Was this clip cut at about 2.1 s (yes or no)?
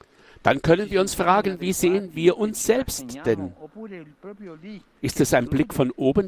no